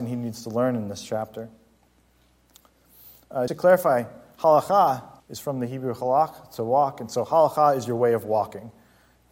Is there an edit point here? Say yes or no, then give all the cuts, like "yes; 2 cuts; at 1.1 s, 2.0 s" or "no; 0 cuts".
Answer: yes; 2 cuts; at 3.5 s, 5.2 s